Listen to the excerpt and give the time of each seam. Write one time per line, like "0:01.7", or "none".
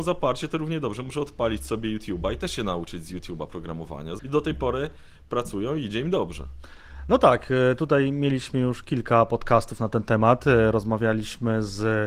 0:04.2